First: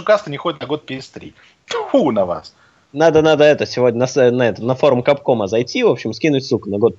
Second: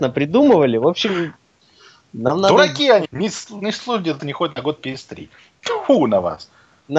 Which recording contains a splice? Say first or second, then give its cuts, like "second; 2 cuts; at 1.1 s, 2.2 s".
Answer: second; 2 cuts; at 3.0 s, 4.2 s